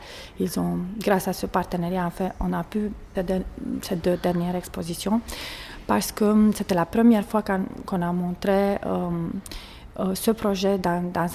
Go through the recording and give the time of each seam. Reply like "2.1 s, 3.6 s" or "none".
3.1 s

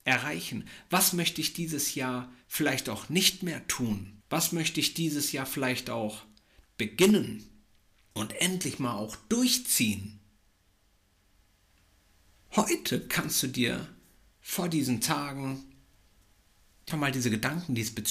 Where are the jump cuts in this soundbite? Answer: 4.2 s, 16.9 s

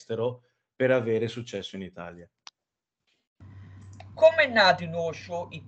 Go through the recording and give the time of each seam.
4.1 s

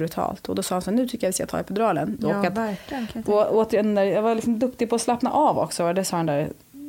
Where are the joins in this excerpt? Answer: 2.2 s

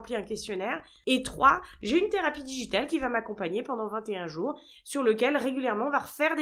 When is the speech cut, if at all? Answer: 1.0 s

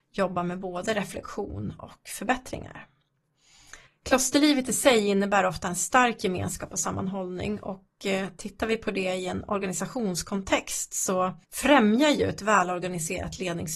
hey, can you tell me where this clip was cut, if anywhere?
3.9 s, 11.4 s

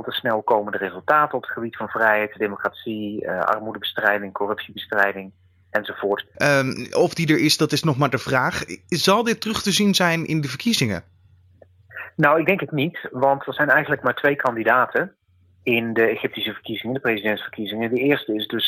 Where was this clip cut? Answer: 6.3 s

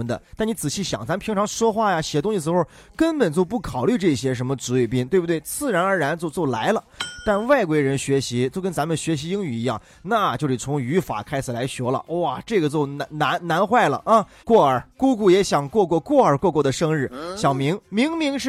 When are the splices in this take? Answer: 14.4 s

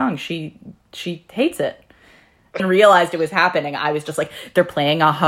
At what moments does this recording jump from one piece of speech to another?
2.6 s

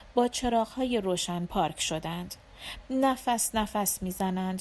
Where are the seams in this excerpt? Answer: 2.8 s

